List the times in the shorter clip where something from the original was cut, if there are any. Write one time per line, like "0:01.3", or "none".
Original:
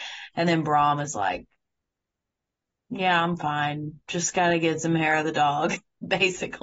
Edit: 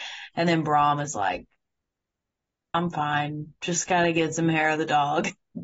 0:02.7